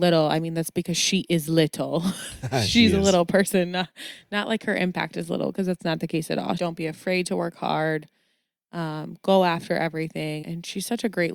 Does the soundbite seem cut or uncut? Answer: cut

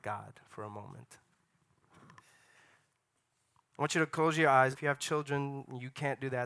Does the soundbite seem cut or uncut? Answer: cut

